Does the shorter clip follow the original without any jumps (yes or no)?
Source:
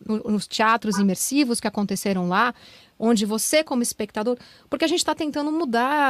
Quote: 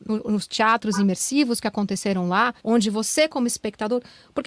no